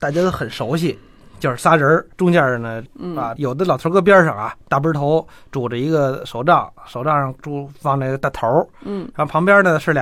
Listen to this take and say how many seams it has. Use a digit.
1